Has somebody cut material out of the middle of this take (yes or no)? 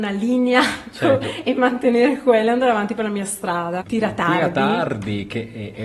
yes